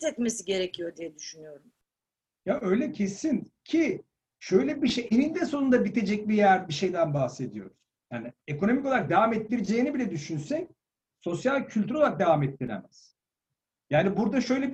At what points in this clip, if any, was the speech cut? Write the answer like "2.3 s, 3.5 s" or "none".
8.1 s